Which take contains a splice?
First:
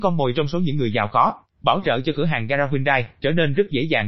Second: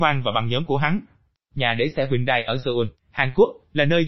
second; 1 cut; at 1.4 s

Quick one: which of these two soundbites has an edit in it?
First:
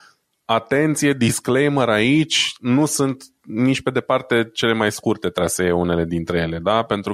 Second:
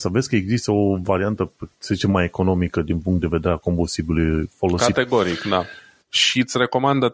second; 1 cut; at 6.0 s

